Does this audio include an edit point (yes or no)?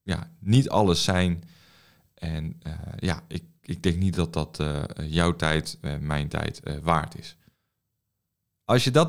no